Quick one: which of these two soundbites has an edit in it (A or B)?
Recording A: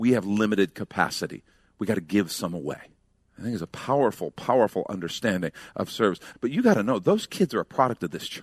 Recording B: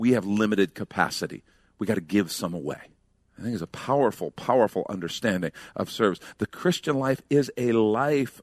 A